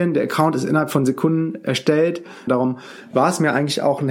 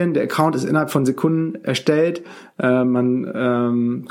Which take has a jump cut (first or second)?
first